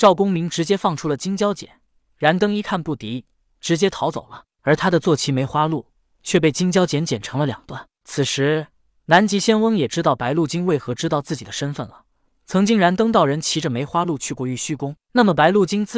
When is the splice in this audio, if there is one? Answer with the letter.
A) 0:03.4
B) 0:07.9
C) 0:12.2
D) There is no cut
D